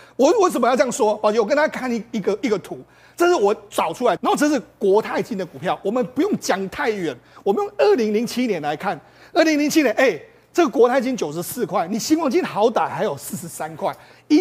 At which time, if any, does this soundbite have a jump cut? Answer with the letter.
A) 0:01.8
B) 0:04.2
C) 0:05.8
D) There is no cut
B